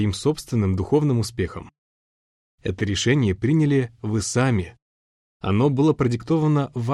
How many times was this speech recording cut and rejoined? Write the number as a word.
one